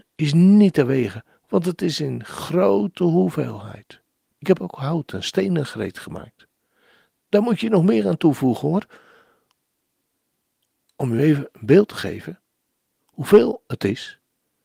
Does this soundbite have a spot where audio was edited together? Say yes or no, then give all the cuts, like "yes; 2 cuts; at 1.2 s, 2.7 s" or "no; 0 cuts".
no; 0 cuts